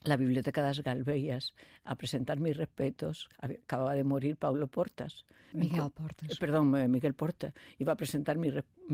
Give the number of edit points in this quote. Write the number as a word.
one